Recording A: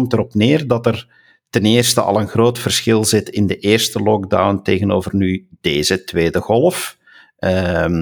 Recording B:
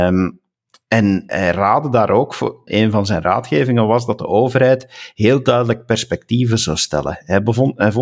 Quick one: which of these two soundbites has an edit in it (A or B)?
B